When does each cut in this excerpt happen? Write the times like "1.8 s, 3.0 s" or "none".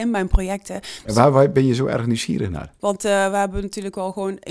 1.1 s, 2.8 s